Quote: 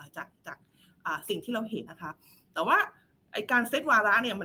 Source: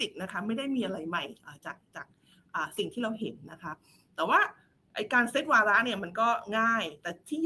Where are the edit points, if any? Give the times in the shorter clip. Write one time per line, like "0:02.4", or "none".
0:01.9